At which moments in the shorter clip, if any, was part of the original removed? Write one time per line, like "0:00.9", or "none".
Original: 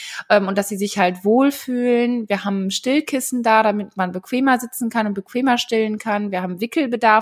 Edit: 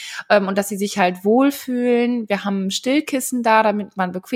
none